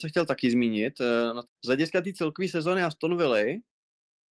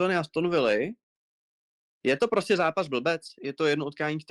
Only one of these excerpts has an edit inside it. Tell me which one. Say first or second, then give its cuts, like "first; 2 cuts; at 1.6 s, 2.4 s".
first; 1 cut; at 1.4 s